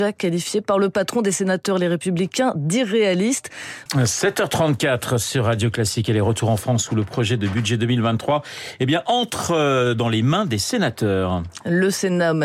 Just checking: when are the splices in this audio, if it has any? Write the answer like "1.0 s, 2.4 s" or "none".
3.9 s